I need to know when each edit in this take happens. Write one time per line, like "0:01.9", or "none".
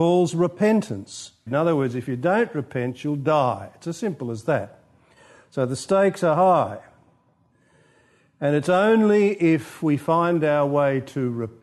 0:01.5

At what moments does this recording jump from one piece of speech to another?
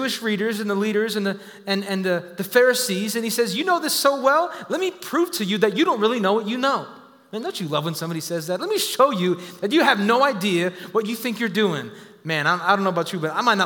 none

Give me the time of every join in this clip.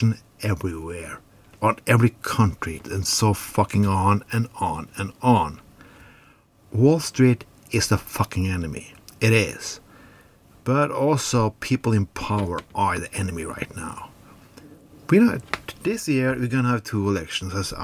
0:02.8

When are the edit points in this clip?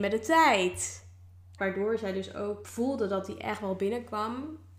0:01.6
0:02.6

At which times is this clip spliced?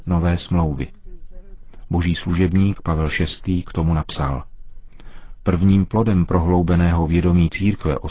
none

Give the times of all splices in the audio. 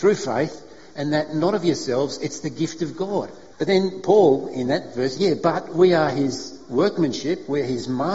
0:03.5
0:05.1

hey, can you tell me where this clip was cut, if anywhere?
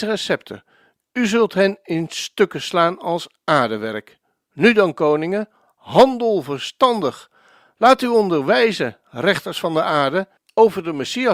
0:10.4

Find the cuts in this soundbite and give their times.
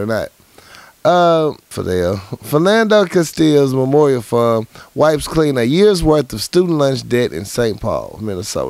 0:01.7

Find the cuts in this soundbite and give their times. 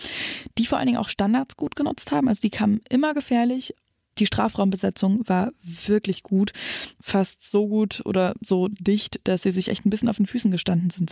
none

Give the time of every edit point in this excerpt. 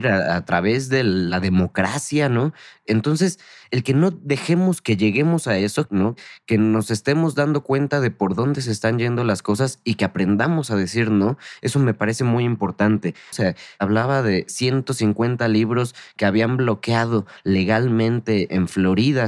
0:05.9
0:13.3

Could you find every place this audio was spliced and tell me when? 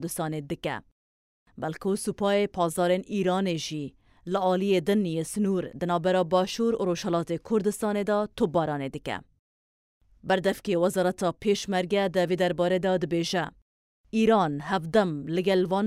none

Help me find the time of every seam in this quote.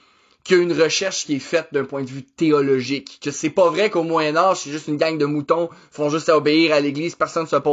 none

